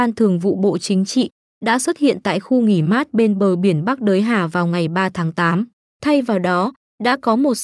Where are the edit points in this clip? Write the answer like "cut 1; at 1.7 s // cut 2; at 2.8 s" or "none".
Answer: cut 1; at 1.5 s // cut 2; at 5.9 s